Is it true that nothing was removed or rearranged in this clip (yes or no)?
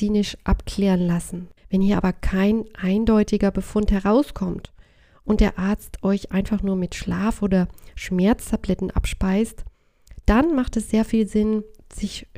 no